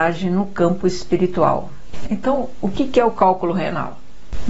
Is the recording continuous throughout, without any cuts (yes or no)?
no